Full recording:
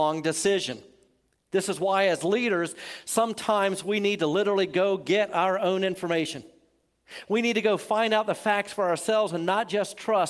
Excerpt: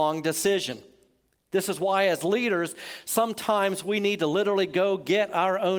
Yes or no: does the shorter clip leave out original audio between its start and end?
no